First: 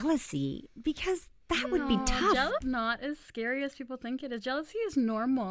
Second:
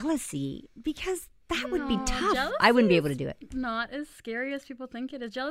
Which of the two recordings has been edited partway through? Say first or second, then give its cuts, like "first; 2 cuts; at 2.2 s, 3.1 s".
first; 1 cut; at 2.6 s